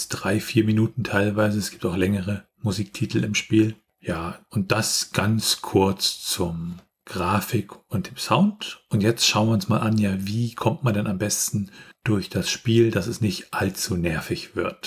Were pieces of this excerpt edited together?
no; 0 cuts

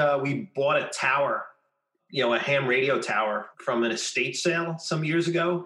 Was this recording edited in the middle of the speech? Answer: yes; 2 cuts; at 2.0 s, 3.5 s

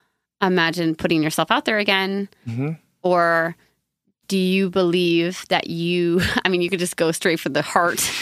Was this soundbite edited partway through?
no; 0 cuts

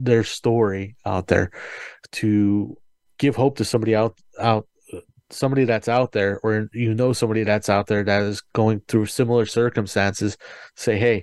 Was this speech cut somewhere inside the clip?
no; 0 cuts

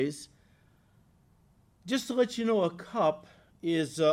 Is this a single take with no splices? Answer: yes; 0 cuts

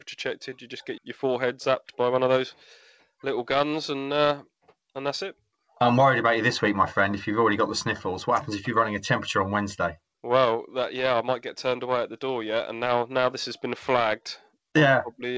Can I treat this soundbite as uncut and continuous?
no; 1 cut; at 1.0 s

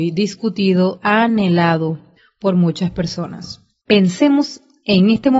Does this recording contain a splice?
yes; 2 cuts; at 1.0 s, 3.8 s

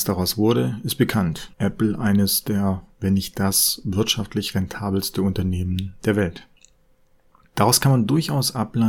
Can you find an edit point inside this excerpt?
yes; 1 cut; at 1.5 s

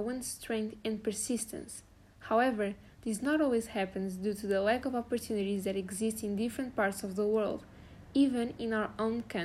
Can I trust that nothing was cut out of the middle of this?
yes; 0 cuts

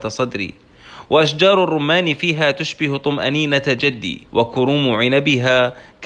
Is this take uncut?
no; 1 cut; at 4.3 s

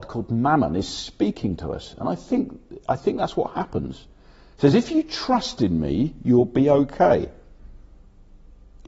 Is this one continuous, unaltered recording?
yes; 0 cuts

